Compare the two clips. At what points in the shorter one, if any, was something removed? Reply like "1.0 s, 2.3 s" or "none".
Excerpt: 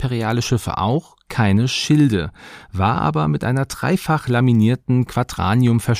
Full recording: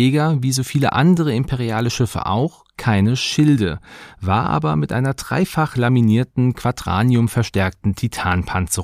none